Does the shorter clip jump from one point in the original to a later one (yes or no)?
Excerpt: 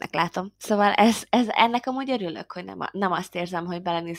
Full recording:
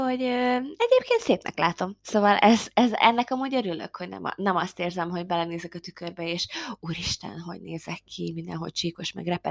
no